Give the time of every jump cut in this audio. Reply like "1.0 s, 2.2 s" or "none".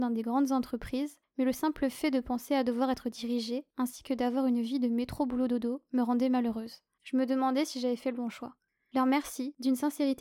6.9 s, 8.8 s